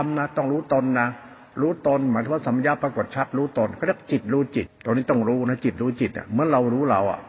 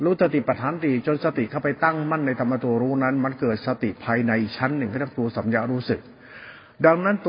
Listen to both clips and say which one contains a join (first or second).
first